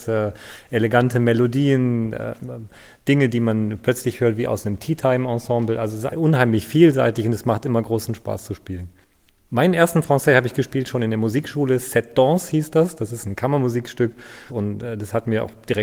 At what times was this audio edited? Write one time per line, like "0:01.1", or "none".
0:06.1
0:14.5